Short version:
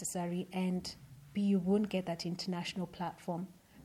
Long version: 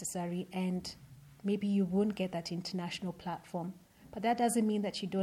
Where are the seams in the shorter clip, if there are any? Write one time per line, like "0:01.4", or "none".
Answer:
0:01.3